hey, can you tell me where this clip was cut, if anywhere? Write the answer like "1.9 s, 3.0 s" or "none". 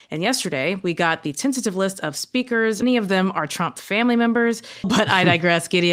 2.8 s, 4.8 s